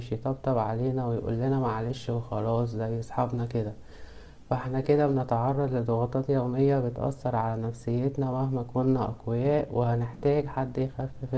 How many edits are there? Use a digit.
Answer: 1